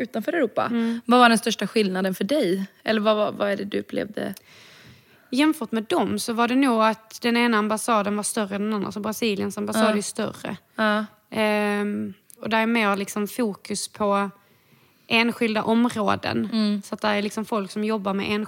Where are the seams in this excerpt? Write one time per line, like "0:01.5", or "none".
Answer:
0:12.4